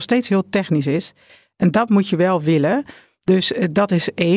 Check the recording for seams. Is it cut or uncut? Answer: uncut